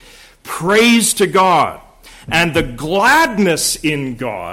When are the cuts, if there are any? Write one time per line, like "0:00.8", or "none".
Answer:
none